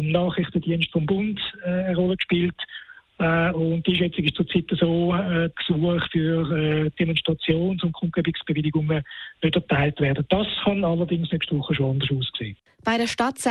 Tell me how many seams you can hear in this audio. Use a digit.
1